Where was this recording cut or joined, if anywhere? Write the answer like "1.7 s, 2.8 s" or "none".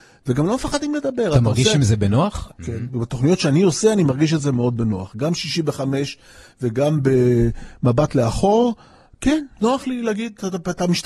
2.5 s